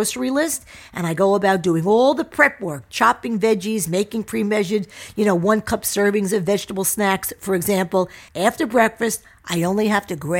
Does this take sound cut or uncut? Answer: cut